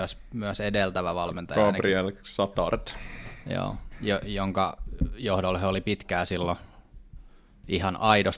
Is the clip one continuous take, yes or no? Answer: yes